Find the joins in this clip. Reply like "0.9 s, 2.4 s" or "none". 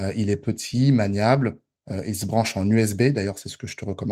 none